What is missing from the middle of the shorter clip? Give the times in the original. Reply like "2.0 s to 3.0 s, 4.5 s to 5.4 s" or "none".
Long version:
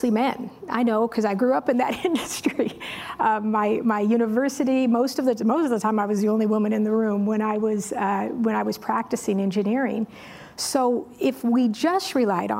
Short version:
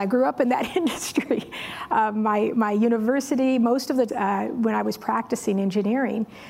5.4 s to 7.9 s

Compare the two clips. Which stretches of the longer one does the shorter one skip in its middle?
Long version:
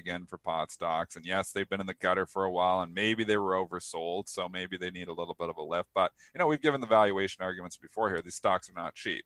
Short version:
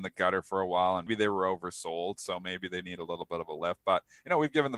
2.9 s to 3.2 s

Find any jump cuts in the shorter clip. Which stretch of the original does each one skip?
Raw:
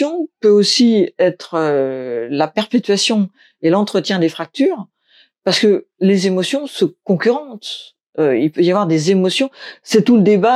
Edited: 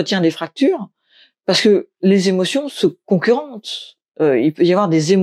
none

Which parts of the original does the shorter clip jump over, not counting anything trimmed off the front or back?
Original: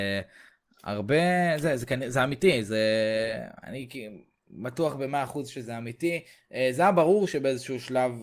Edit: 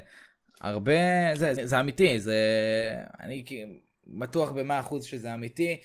1.8 s to 2.0 s

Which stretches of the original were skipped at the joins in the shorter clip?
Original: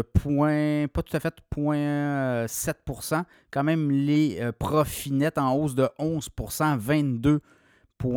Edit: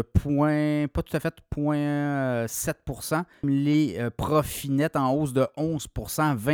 3.4 s to 3.9 s

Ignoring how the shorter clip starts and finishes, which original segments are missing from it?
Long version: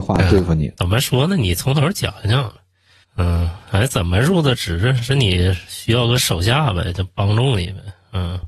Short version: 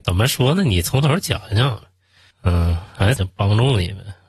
3.9 s to 6.9 s

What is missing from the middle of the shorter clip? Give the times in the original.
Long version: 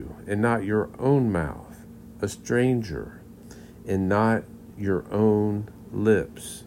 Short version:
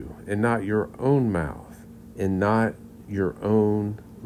2.1 s to 3.8 s

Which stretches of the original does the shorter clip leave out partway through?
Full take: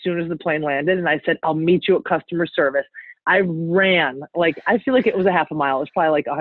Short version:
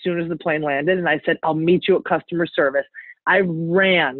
none

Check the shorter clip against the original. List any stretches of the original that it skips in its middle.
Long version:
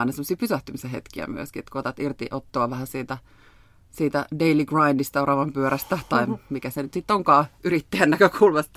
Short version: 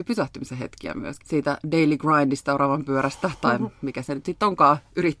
1.5 s to 3.9 s

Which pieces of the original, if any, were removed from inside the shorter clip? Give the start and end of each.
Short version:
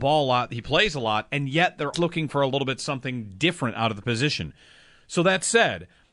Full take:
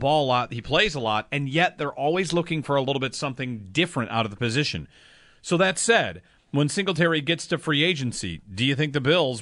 1.9 s to 2.3 s

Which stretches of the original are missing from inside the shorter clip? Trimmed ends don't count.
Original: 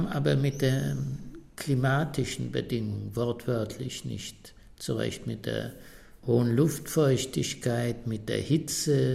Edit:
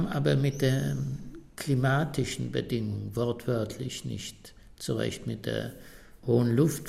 none

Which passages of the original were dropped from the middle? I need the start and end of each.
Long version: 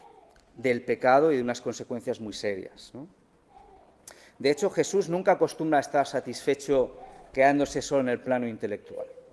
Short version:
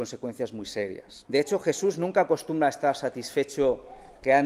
2.9 s to 4.4 s

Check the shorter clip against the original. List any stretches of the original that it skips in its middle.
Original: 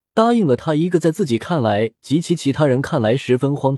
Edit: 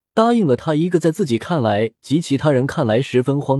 2.2 s to 2.4 s

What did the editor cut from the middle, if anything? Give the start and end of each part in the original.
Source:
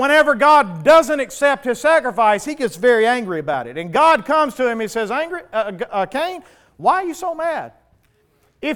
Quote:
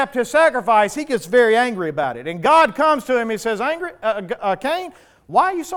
none

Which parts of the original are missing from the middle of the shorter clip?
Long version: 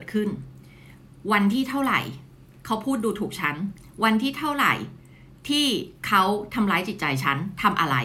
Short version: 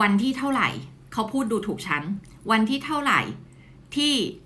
2.4 s to 2.6 s

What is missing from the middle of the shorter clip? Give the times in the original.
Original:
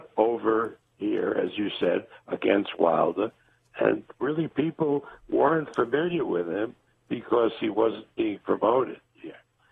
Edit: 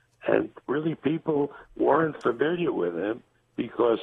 none

